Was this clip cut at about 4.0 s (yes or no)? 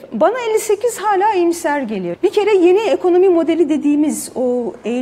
no